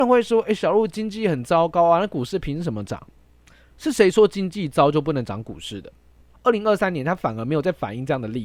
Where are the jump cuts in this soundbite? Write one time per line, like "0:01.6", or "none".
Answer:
0:03.1
0:06.3